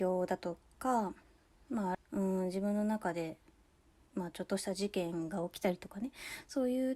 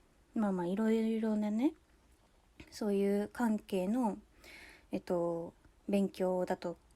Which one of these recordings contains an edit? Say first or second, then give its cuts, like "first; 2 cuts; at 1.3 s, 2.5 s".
first; 1 cut; at 1.9 s